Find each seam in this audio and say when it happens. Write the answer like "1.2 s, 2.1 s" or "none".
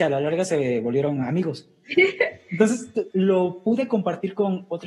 1.8 s, 3.1 s